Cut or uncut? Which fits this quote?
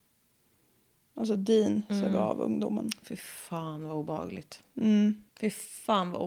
cut